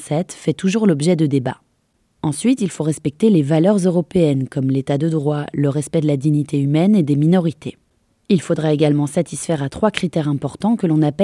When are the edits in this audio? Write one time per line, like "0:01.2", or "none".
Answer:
none